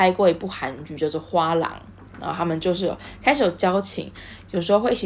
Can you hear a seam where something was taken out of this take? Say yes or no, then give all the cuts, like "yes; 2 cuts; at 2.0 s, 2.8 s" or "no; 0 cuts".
yes; 1 cut; at 2.1 s